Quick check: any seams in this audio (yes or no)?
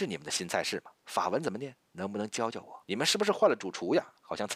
yes